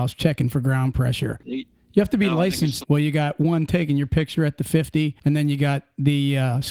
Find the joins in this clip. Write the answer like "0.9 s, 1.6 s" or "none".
1.4 s, 2.8 s, 5.2 s